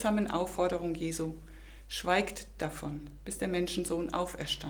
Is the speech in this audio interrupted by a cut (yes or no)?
no